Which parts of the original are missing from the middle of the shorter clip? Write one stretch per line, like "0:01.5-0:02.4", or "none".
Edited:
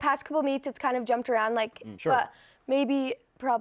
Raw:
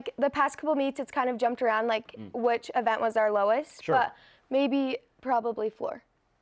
0:02.3-0:03.8